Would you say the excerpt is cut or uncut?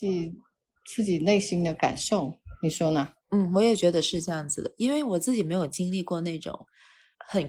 cut